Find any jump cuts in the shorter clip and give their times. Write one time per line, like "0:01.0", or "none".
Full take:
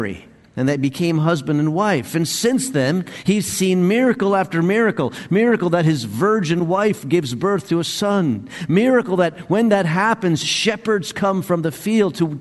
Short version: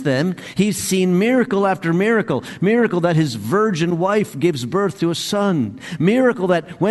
none